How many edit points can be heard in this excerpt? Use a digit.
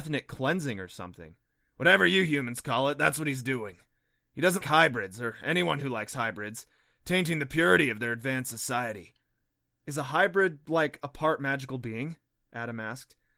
1